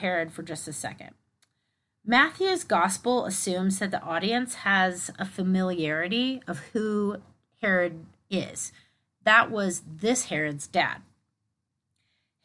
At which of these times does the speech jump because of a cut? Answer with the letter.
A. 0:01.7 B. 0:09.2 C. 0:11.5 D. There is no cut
B